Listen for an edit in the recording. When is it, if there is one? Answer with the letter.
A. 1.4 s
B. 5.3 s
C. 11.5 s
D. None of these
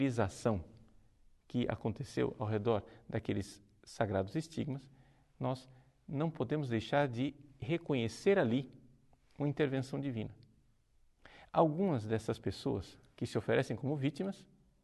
C